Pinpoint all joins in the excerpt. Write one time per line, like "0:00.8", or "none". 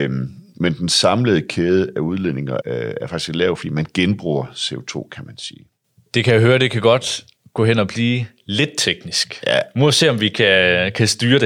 0:02.6